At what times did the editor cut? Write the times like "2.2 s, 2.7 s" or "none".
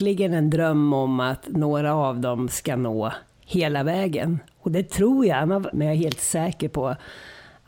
5.7 s

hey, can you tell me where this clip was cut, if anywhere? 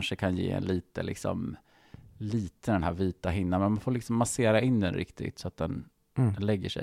none

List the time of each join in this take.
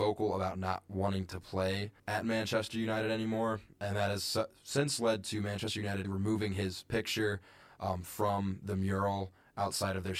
2.0 s, 6.0 s

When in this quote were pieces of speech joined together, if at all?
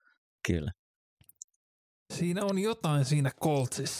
2.0 s

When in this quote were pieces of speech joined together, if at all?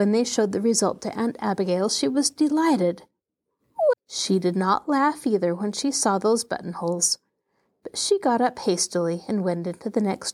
3.9 s

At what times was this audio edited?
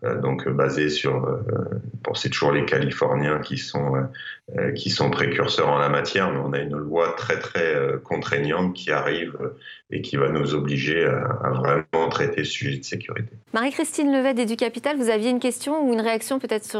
13.5 s

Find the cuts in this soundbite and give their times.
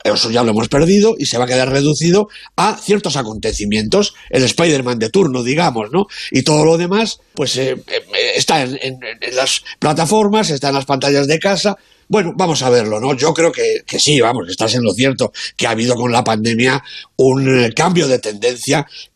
7.3 s

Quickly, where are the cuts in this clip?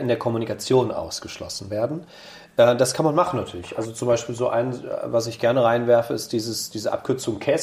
none

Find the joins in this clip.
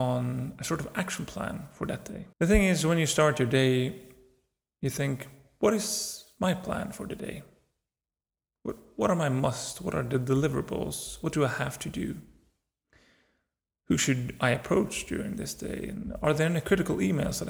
2.3 s

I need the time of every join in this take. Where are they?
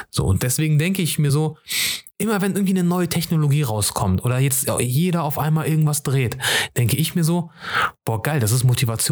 none

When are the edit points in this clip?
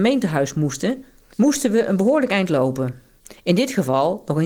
1.3 s

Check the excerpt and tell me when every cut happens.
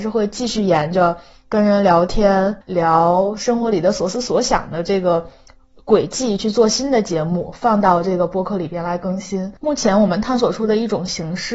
2.6 s, 9.6 s

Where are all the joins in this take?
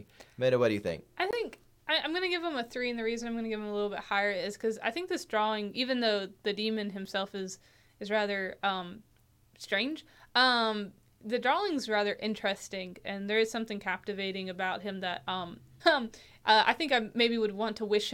15.8 s

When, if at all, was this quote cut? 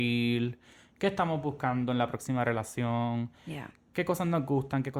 none

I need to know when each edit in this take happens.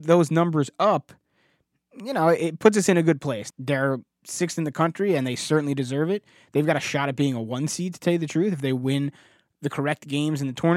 3.5 s

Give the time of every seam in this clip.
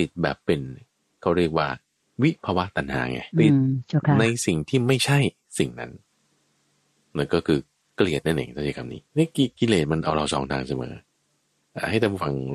3.3 s, 9.1 s

